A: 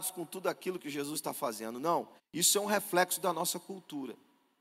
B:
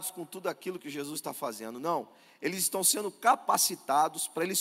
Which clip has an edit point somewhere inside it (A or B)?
A